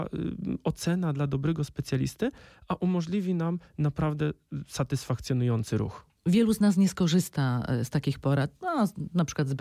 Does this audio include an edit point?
no; 0 cuts

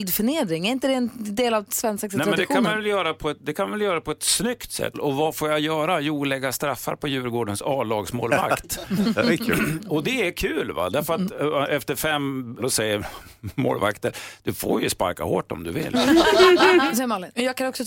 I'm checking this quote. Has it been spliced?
yes; 2 cuts; at 4.9 s, 12.6 s

